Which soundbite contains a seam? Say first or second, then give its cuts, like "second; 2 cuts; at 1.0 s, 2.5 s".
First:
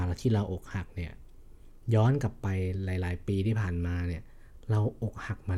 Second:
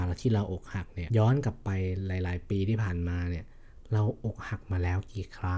second; 1 cut; at 1.1 s